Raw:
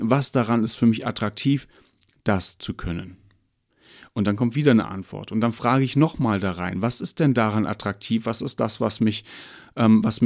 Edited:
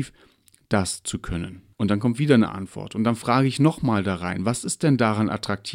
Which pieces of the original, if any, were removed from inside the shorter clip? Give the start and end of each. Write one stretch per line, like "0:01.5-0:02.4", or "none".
0:03.3-0:04.1